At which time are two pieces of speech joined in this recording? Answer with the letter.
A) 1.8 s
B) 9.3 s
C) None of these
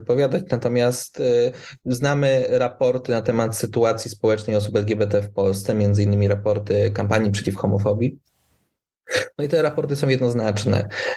C